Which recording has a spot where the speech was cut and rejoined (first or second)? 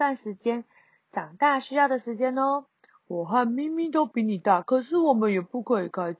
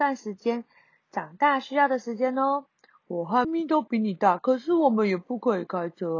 second